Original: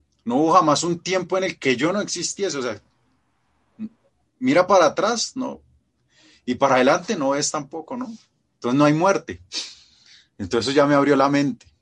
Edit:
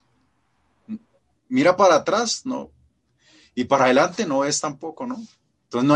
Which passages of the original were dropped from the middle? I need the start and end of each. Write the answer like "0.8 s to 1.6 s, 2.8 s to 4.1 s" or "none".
none